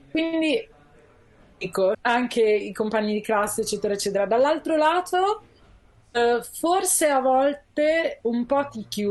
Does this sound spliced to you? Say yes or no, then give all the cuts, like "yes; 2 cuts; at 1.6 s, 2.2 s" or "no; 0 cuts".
yes; 1 cut; at 1.9 s